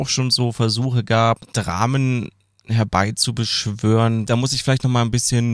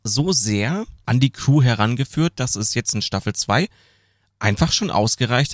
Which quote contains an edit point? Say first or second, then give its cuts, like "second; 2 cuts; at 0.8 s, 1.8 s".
first; 1 cut; at 4.3 s